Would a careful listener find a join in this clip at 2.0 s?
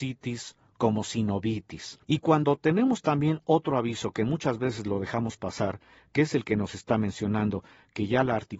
yes; 1 cut; at 2.0 s

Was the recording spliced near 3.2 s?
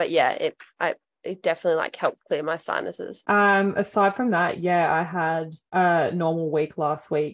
yes; 1 cut; at 3.2 s

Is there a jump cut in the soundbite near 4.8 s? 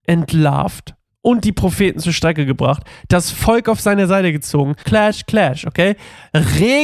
yes; 1 cut; at 4.8 s

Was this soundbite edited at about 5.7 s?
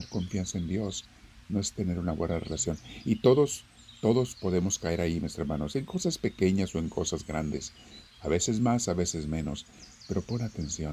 no; 0 cuts

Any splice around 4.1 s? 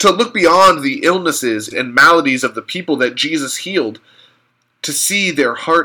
no; 1 cut; at 1.7 s

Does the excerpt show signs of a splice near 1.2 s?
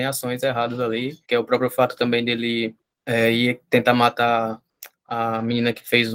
yes; 1 cut; at 1.2 s

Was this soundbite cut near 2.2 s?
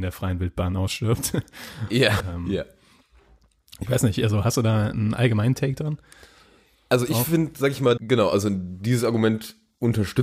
yes; 2 cuts; at 2.2 s, 8.0 s

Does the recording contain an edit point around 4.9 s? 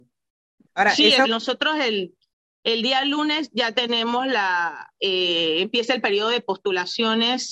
no; 1 cut; at 1.2 s

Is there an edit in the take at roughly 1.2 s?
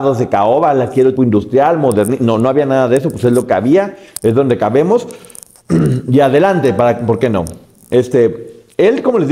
yes; 1 cut; at 1.2 s

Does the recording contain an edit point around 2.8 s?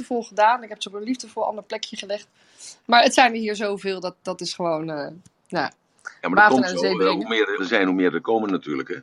no; 1 cut; at 7.6 s

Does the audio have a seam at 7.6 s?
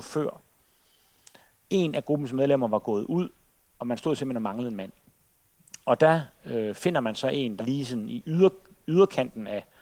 yes; 1 cut; at 7.6 s

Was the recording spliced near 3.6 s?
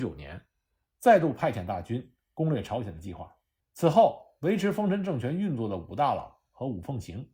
yes; 1 cut; at 3.6 s

